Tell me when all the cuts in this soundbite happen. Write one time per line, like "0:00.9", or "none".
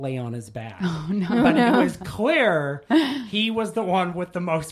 none